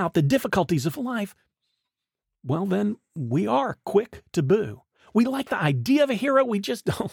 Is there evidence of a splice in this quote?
no; 0 cuts

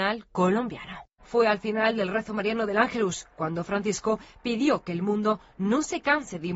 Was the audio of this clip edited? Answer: yes; 1 cut; at 1.2 s

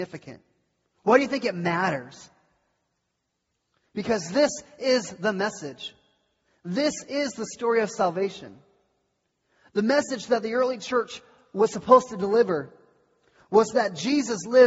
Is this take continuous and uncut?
yes; 0 cuts

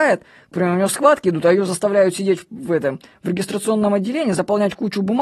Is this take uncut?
yes; 0 cuts

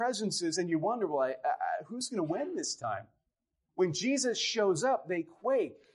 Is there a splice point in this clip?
no; 0 cuts

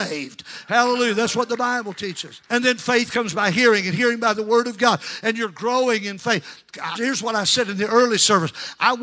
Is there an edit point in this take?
yes; 2 cuts; at 2.4 s, 7.0 s

